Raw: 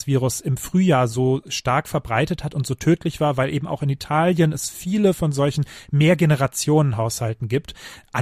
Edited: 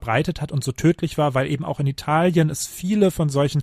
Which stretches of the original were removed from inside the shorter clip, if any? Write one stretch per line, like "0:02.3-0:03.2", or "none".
none